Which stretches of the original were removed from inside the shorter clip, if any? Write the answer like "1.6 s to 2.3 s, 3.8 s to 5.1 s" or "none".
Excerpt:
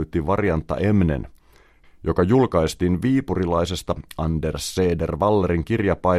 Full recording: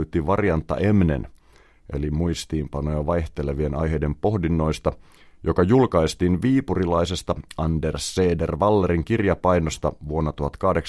1.8 s to 5.2 s